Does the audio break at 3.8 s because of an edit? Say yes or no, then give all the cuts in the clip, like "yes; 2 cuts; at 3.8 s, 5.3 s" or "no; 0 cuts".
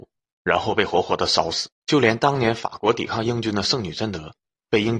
no; 1 cut; at 1.8 s